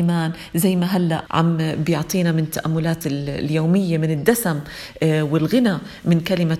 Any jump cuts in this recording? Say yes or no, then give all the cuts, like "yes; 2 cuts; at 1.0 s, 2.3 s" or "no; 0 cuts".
yes; 1 cut; at 1.3 s